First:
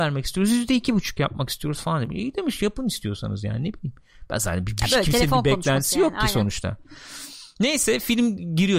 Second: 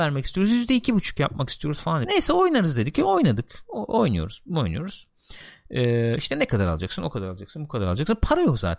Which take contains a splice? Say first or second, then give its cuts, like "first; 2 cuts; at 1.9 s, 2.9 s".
second; 1 cut; at 2.0 s